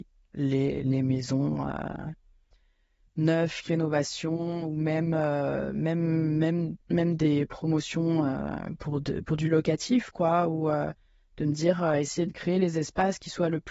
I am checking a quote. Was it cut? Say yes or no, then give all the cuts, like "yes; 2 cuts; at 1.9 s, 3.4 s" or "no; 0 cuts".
yes; 1 cut; at 6.8 s